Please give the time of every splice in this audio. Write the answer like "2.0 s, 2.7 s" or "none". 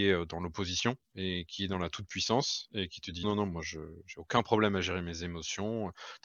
3.2 s